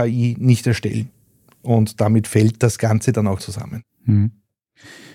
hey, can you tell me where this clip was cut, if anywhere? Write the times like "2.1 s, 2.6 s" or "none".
3.4 s

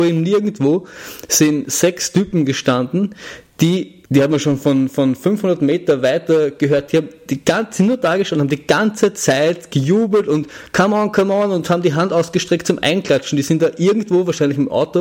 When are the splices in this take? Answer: 4.1 s

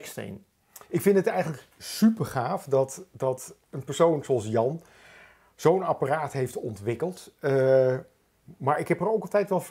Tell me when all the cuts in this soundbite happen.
none

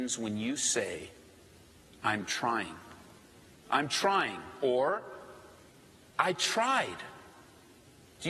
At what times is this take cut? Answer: 3.6 s

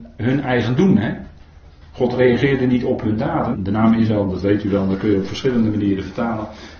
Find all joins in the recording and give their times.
3.5 s

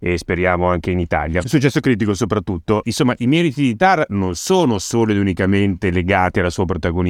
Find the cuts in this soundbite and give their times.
1.4 s, 2.8 s

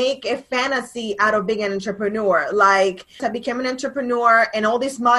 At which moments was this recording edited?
3.2 s

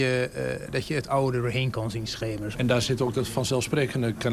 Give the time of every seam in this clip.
2.5 s

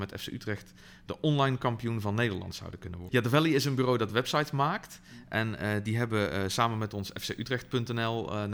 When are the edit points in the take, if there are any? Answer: 3.1 s

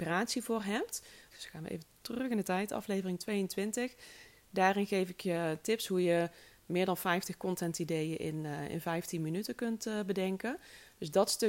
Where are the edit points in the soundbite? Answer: 1.3 s

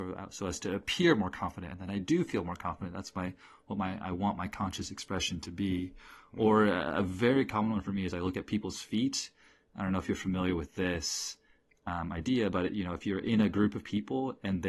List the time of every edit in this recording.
none

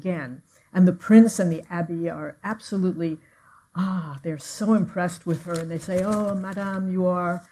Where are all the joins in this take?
none

